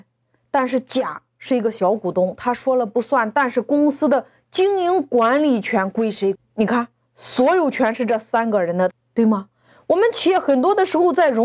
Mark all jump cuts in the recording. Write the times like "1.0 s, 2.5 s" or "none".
6.4 s, 8.9 s